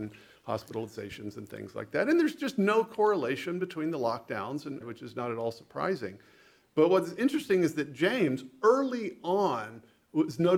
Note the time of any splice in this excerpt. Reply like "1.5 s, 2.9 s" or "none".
4.8 s